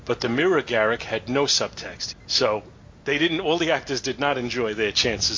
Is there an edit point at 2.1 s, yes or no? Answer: yes